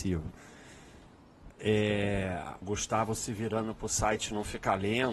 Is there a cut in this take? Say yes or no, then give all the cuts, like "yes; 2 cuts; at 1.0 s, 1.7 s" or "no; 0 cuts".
yes; 2 cuts; at 1.5 s, 2.6 s